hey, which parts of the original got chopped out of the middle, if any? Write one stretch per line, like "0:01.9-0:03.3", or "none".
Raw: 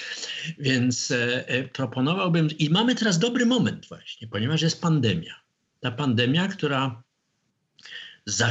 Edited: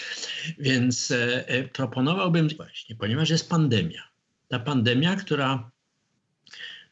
0:02.6-0:03.9